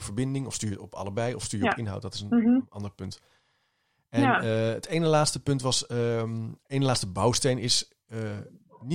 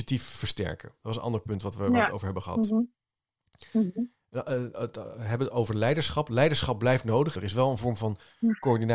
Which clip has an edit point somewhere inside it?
second; 2 cuts; at 4.7 s, 7.3 s

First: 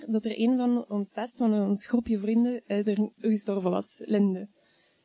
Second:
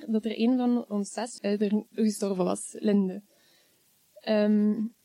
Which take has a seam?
second; 1 cut; at 1.4 s

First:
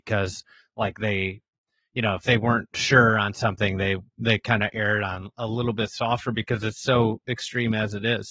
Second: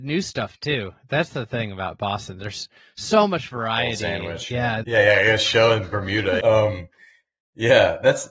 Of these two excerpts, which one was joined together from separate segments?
second; 2 cuts; at 4.8 s, 6.4 s

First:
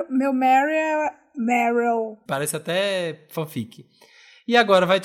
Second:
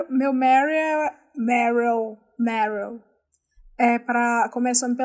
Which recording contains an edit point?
first; 1 cut; at 2.3 s

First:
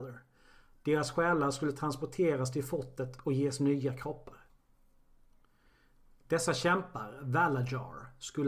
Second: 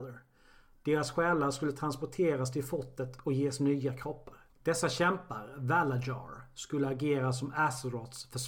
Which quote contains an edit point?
second; 1 cut; at 4.5 s

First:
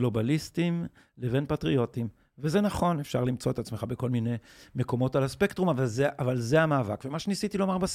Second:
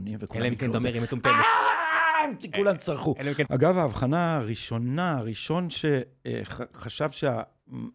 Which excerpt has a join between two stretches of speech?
second; 1 cut; at 3.5 s

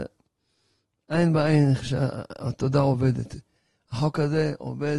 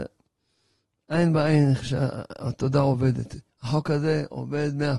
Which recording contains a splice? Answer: second; 1 cut; at 3.5 s

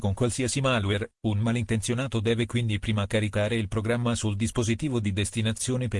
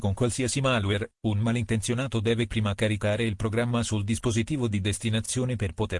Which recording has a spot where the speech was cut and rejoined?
second; 1 cut; at 2.5 s

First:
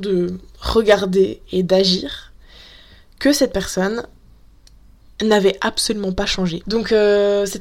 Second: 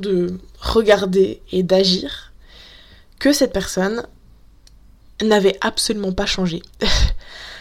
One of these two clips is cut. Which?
first; 1 cut; at 6.6 s

